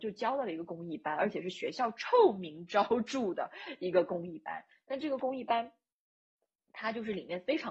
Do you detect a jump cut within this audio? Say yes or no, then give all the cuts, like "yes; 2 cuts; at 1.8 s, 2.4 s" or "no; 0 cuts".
no; 0 cuts